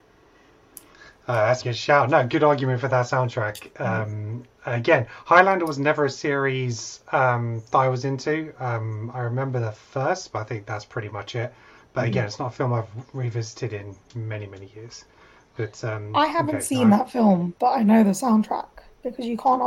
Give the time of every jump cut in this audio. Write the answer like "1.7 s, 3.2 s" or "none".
1.6 s